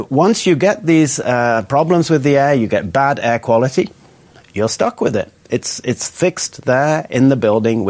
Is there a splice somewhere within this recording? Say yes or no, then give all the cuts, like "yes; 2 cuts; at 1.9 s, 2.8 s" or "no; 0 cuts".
no; 0 cuts